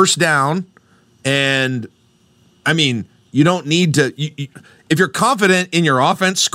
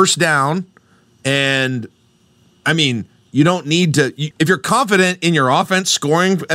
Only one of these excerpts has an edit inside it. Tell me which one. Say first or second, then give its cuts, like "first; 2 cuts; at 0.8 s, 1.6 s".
second; 1 cut; at 4.3 s